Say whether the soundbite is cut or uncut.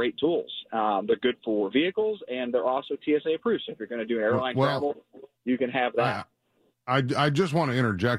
uncut